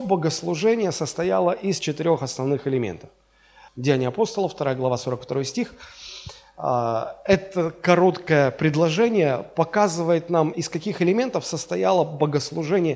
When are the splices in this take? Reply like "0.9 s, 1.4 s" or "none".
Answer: 3.7 s, 10.5 s